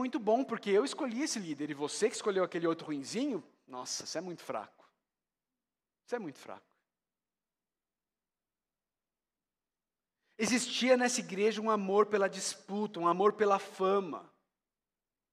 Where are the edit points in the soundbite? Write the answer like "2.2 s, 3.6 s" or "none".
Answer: none